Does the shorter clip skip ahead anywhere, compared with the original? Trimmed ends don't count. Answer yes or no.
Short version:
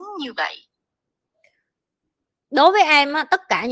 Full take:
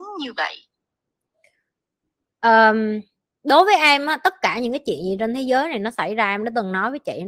yes